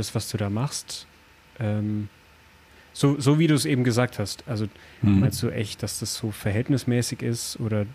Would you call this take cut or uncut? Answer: uncut